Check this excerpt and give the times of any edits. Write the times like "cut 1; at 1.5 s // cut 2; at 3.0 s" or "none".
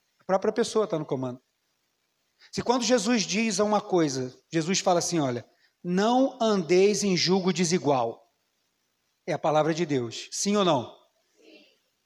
none